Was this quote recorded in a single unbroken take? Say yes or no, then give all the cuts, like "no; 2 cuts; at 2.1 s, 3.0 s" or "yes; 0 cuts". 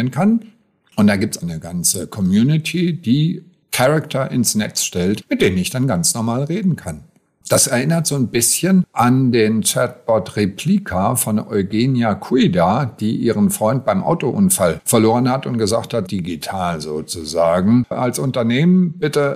no; 2 cuts; at 16.1 s, 17.9 s